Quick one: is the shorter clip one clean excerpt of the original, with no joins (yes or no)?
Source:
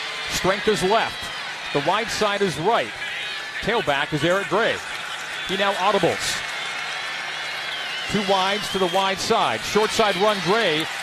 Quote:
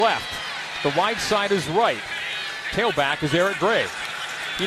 yes